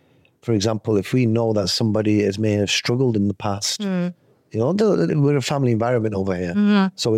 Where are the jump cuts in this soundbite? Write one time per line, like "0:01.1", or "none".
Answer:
0:05.1